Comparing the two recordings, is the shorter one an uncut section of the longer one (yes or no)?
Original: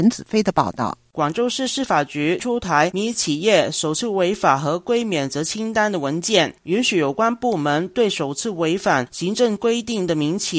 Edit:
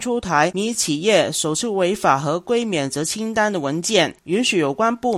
yes